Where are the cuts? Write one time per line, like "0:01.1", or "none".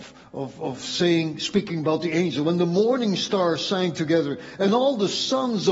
none